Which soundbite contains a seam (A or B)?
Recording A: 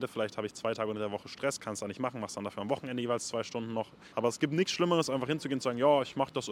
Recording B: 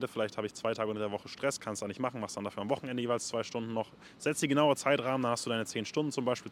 A